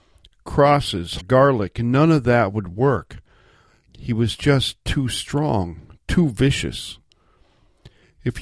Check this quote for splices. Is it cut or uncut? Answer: cut